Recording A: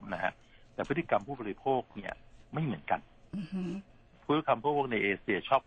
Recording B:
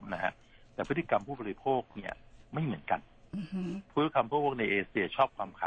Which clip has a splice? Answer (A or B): B